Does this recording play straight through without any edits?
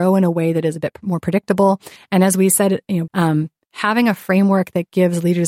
no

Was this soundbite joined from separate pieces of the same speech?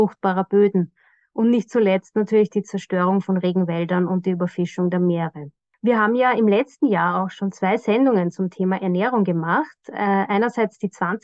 no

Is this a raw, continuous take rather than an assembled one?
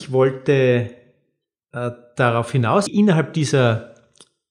no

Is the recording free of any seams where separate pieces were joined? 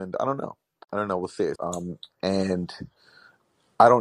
no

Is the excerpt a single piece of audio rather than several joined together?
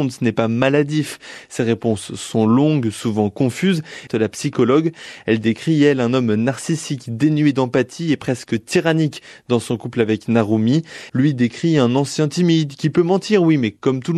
no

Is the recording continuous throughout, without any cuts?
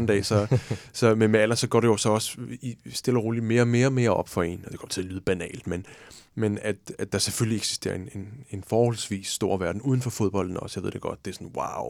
yes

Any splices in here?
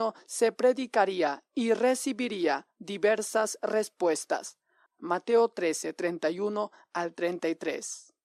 yes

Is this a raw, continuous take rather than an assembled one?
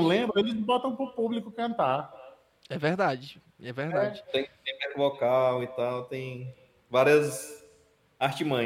yes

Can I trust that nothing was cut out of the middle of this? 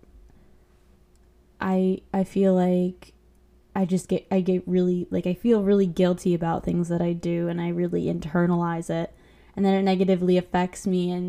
yes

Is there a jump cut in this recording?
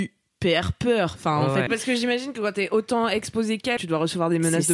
yes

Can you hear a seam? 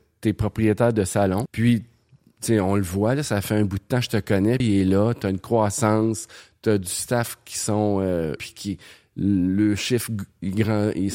yes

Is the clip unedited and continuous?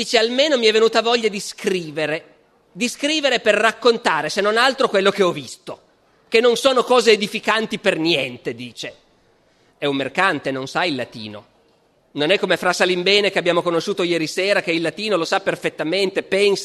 no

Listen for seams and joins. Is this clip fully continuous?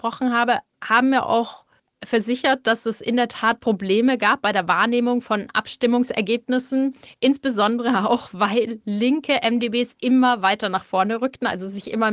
yes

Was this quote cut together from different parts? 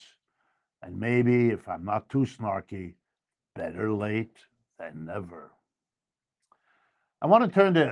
no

